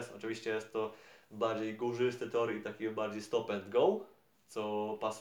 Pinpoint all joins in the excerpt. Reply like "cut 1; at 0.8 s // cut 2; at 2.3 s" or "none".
none